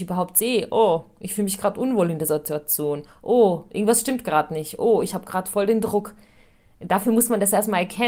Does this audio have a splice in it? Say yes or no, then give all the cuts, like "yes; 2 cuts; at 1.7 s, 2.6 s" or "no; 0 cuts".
no; 0 cuts